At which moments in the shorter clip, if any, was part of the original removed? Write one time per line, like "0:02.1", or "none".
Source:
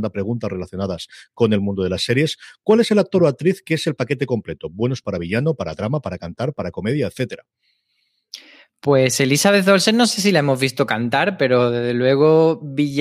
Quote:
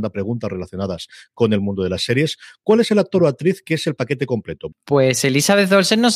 0:04.7